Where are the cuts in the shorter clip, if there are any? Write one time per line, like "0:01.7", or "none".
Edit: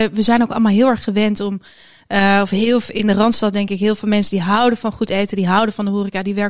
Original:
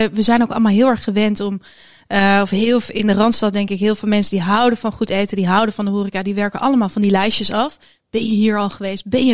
none